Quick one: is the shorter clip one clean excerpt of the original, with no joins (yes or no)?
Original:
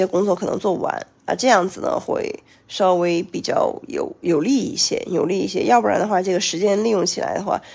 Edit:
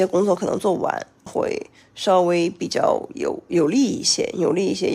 no